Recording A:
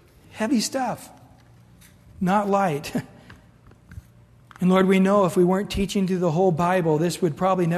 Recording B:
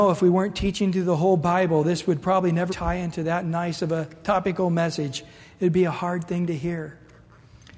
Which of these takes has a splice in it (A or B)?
B